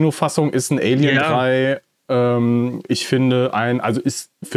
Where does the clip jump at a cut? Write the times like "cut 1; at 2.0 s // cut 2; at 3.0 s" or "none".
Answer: none

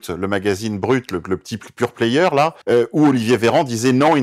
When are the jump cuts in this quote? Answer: cut 1; at 2.6 s

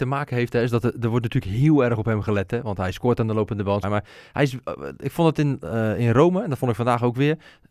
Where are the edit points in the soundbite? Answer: cut 1; at 3.8 s

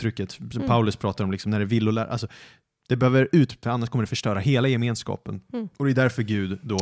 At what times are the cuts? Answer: cut 1; at 3.6 s

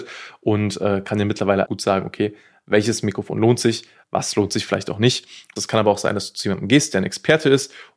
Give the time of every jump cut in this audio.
cut 1; at 1.7 s // cut 2; at 4.0 s // cut 3; at 5.6 s

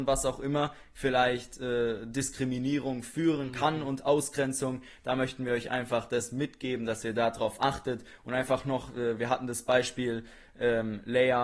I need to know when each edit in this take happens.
cut 1; at 0.9 s

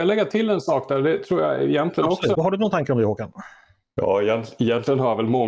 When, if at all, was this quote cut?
cut 1; at 2.3 s

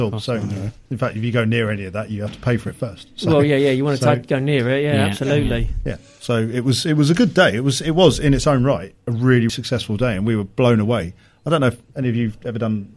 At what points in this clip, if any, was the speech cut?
cut 1; at 9.5 s

